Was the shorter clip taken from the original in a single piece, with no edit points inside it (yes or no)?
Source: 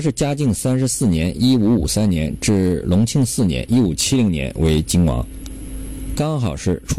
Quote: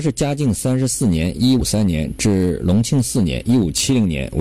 no